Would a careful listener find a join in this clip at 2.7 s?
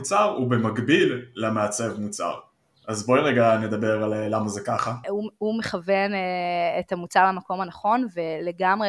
no; 1 cut; at 5.0 s

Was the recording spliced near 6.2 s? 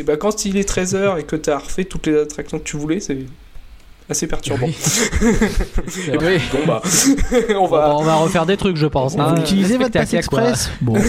yes; 1 cut; at 6.2 s

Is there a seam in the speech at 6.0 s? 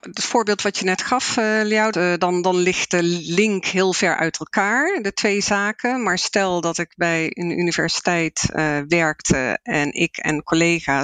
no; 1 cut; at 1.9 s

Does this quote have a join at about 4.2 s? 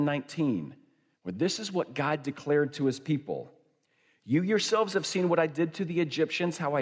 no; 1 cut; at 1.2 s

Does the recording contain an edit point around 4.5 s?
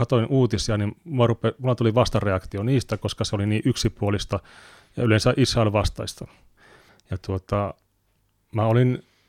no; 1 cut; at 6.9 s

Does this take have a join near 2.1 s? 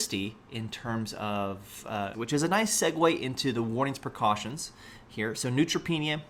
yes; 1 cut; at 2.1 s

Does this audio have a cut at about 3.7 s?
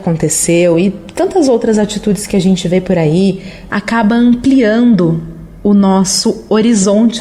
yes; 1 cut; at 3.7 s

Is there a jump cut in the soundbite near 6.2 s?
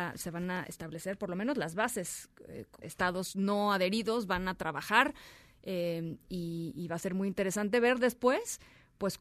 no; 1 cut; at 2.8 s

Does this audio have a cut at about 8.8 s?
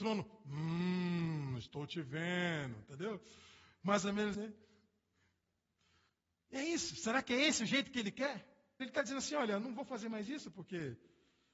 yes; 2 cuts; at 4.3 s, 8.8 s

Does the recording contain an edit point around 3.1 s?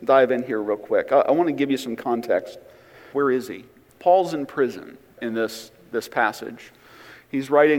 yes; 2 cuts; at 3.1 s, 5.2 s

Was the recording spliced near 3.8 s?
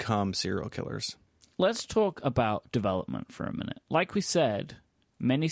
no; 1 cut; at 1.4 s

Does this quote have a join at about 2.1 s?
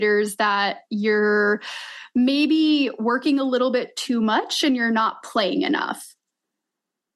no; 0 cuts

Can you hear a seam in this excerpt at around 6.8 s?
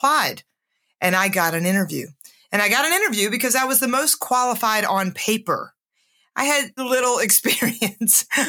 yes; 1 cut; at 6.8 s

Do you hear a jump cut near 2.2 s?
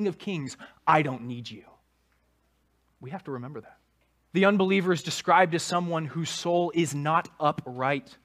no; 1 cut; at 4.3 s

